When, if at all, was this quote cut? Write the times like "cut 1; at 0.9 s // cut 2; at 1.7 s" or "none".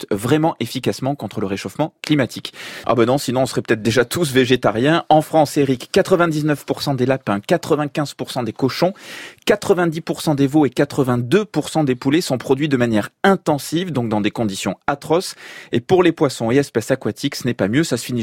cut 1; at 2.8 s